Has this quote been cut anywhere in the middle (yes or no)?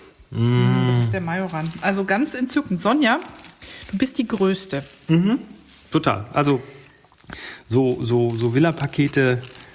no